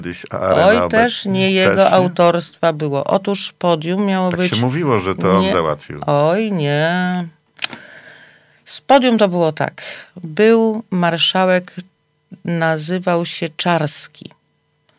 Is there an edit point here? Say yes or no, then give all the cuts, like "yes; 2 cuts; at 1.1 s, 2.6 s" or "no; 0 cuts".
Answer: no; 0 cuts